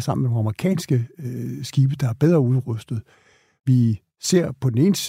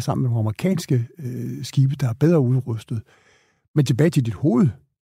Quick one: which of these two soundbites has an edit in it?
first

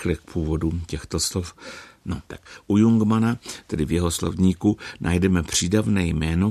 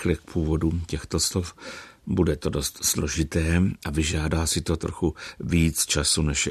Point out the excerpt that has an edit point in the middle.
first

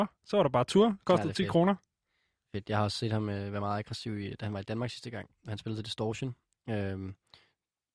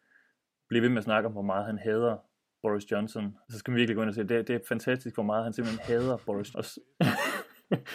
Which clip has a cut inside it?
second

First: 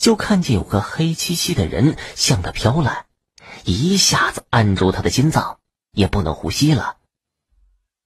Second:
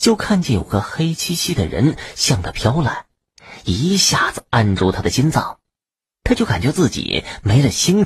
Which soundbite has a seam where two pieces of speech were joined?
first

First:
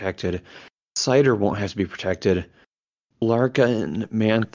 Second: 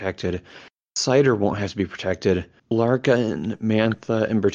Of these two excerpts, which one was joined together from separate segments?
second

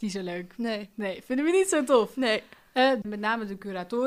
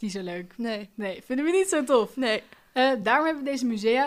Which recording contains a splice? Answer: first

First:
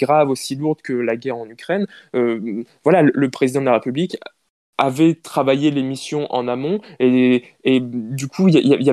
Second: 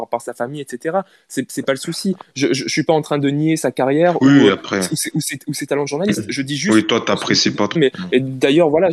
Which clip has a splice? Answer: second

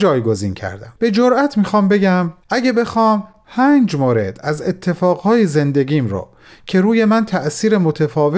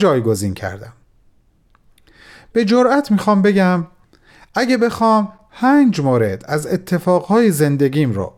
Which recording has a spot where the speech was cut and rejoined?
first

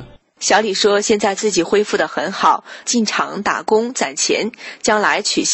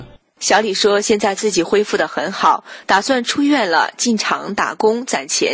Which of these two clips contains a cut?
first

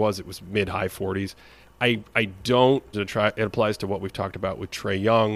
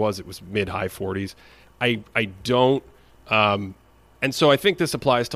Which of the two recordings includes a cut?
first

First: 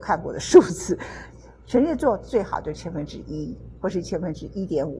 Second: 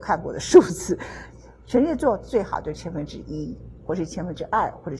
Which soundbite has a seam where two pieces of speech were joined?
second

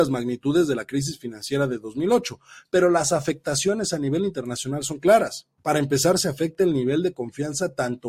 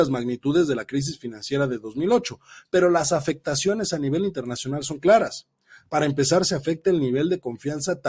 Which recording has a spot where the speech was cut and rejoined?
first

